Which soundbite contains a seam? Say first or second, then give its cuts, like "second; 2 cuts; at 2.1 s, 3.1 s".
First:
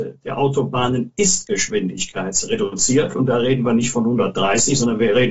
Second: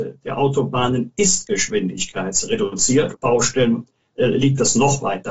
second; 1 cut; at 3.1 s